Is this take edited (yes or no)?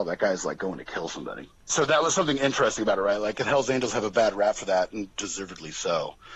yes